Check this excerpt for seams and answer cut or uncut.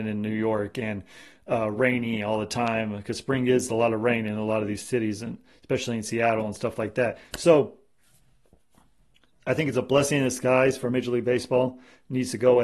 uncut